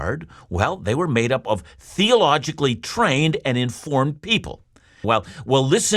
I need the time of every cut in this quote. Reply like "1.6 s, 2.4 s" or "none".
5.0 s